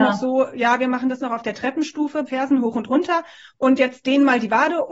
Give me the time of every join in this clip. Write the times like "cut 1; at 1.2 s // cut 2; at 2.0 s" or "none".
cut 1; at 2.3 s